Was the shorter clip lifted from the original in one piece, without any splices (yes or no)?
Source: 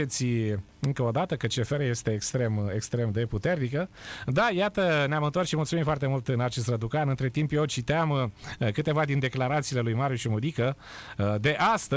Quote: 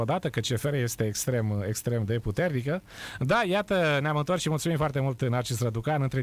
yes